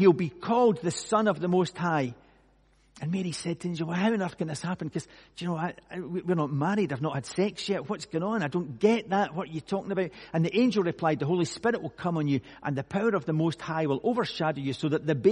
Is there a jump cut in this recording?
no; 0 cuts

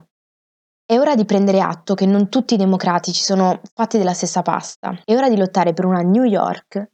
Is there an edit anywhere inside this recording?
yes; 1 cut; at 5.0 s

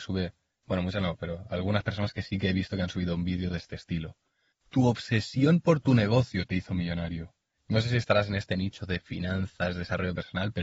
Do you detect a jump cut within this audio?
yes; 2 cuts; at 4.5 s, 7.6 s

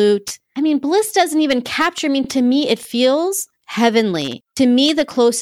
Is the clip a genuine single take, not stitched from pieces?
yes; 0 cuts

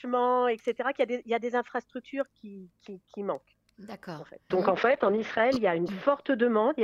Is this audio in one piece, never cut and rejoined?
no; 1 cut; at 4.5 s

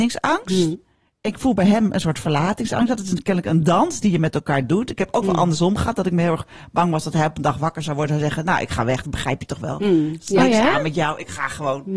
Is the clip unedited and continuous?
yes; 0 cuts

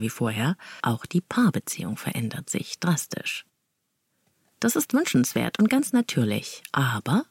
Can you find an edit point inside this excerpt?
no; 0 cuts

